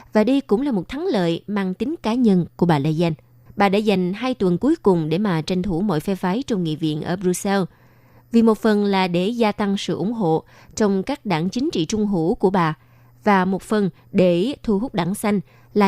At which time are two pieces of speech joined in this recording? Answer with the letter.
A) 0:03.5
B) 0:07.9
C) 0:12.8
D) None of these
A